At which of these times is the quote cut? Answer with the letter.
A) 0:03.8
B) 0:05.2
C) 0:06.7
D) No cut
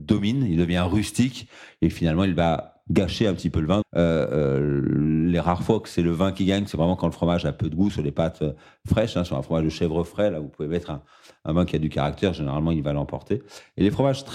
A